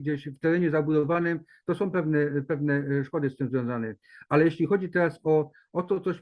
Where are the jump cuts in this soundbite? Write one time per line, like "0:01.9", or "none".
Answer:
none